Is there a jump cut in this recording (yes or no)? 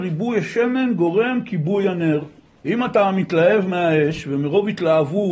yes